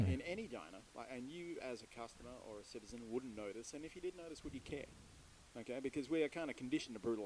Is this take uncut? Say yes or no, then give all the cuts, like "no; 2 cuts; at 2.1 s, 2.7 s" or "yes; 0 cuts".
yes; 0 cuts